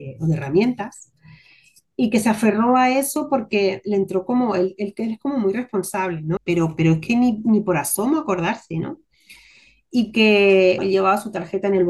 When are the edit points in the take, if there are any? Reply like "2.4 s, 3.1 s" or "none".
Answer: 6.4 s, 10.8 s